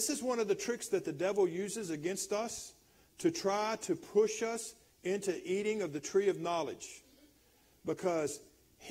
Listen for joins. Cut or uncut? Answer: uncut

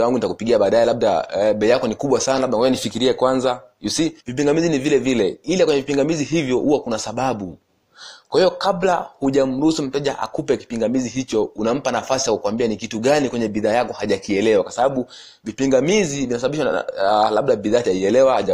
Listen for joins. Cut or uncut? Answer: cut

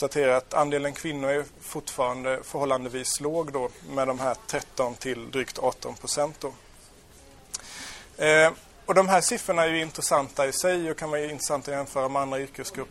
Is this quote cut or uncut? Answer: cut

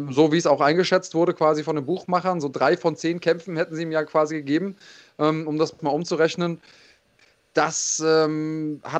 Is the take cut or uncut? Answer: uncut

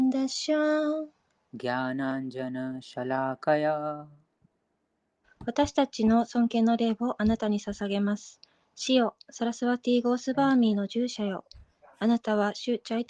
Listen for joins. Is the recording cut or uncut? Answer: cut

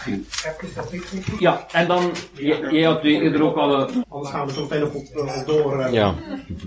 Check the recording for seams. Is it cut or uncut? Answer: cut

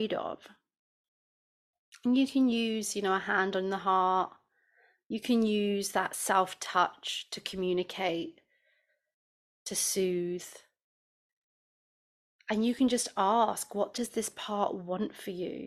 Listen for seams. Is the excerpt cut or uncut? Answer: uncut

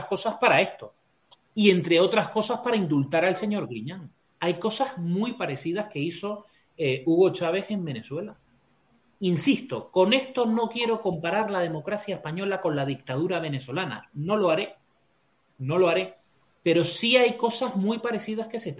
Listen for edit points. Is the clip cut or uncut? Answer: cut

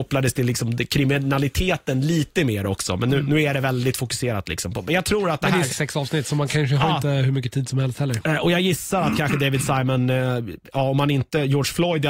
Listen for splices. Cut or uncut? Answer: cut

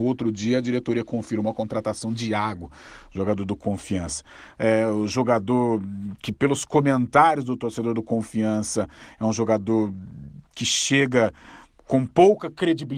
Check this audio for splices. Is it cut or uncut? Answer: cut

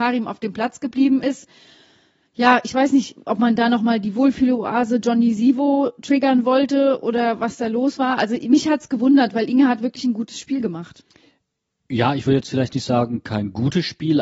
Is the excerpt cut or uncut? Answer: uncut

